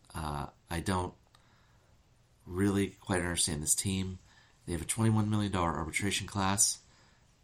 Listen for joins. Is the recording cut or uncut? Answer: uncut